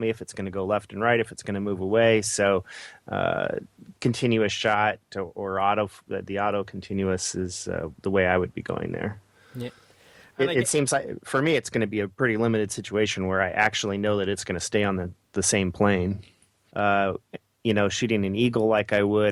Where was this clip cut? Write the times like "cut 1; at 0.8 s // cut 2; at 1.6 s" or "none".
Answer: cut 1; at 16.7 s